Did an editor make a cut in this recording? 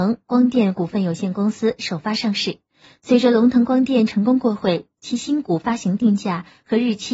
no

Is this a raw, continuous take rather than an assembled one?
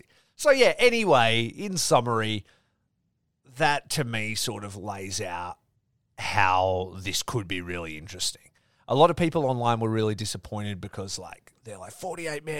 yes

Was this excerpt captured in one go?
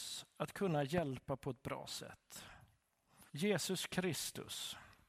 no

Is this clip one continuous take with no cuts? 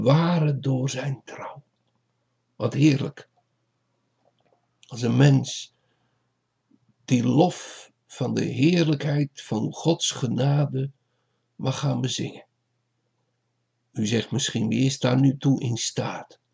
yes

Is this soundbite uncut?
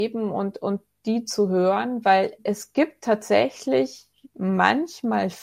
yes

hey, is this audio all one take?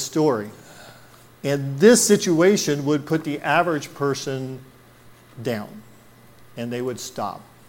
no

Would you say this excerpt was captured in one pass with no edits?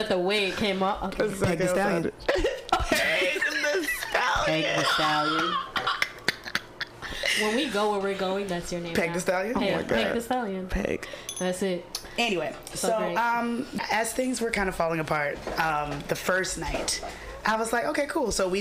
yes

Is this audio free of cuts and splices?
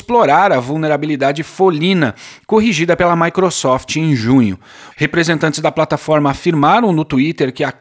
no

